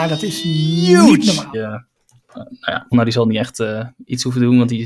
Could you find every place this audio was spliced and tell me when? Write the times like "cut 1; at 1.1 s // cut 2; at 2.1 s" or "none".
cut 1; at 1.5 s // cut 2; at 2.9 s